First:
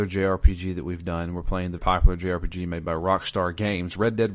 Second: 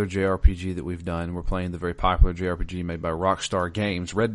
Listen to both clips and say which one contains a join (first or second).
first